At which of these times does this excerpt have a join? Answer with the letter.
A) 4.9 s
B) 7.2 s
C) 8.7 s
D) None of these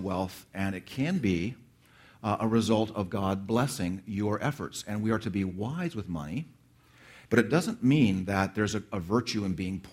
B